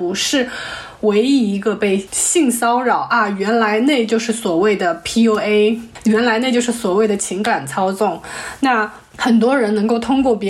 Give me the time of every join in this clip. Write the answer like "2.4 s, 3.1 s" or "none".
none